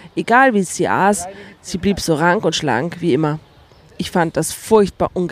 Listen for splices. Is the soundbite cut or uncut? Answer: uncut